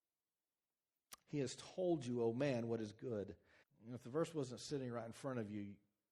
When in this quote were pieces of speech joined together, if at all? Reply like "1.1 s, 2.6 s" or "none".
3.6 s